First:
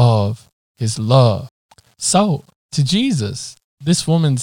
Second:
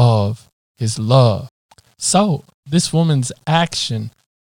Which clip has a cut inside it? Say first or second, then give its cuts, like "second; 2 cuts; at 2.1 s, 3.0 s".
second; 1 cut; at 2.5 s